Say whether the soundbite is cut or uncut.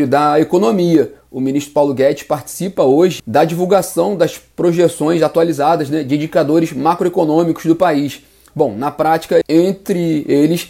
cut